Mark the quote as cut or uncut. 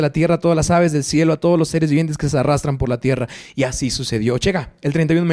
uncut